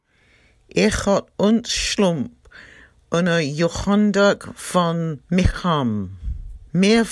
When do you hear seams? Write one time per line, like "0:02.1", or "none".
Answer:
none